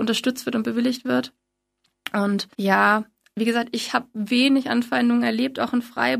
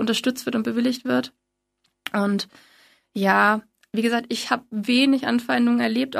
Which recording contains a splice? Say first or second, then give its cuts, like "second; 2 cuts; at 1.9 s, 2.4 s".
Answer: first; 1 cut; at 2.5 s